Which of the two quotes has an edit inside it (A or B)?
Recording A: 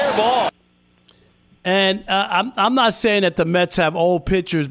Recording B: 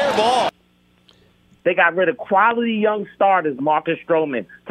B